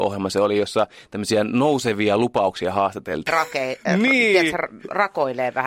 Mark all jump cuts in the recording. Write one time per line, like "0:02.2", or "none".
0:03.3